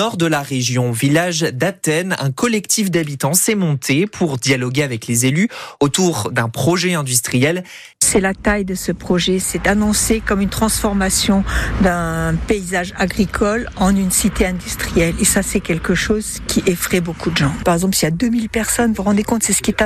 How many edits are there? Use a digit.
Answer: 1